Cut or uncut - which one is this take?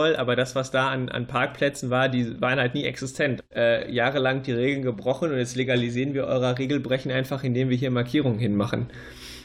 cut